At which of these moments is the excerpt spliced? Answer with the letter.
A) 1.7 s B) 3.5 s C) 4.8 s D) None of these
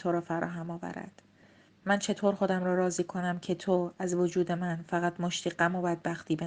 A